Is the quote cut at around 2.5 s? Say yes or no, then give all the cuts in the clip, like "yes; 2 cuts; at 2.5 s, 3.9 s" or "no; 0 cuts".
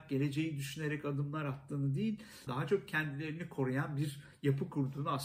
yes; 1 cut; at 2.5 s